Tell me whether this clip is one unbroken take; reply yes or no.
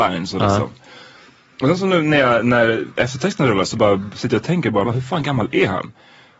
no